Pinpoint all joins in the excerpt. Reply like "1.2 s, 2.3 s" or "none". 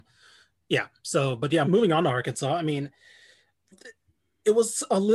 1.6 s, 3.7 s